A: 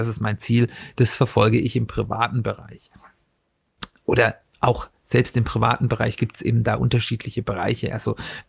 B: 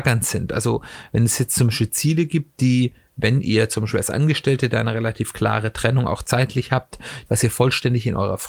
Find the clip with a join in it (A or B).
B